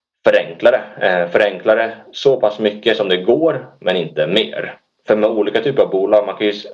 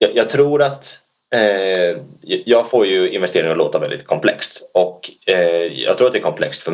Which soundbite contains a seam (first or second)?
first